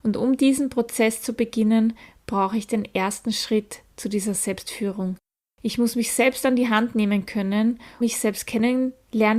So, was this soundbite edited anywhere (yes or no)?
yes